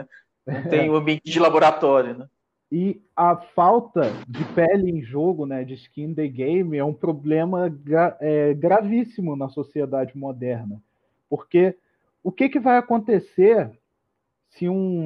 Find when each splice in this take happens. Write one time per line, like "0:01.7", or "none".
none